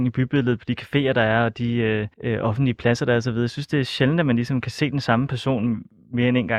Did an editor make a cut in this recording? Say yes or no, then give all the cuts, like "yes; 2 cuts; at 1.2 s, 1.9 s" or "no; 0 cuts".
yes; 1 cut; at 2.1 s